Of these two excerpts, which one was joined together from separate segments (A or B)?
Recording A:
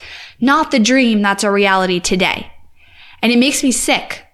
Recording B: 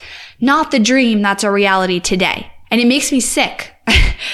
B